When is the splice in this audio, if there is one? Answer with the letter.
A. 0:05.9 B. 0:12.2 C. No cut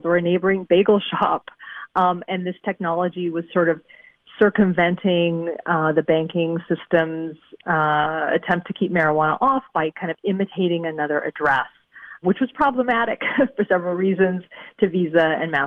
B